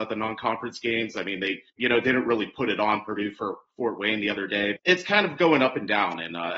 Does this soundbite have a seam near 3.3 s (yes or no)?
no